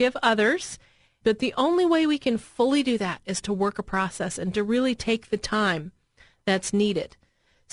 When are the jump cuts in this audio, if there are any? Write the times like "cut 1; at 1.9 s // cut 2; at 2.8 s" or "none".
cut 1; at 1.2 s